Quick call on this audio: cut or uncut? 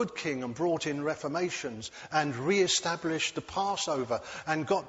uncut